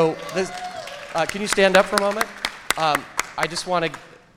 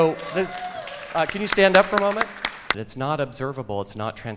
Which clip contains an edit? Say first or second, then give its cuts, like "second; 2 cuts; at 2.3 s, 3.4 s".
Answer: second; 1 cut; at 2.7 s